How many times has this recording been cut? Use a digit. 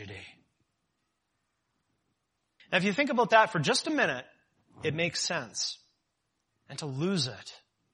2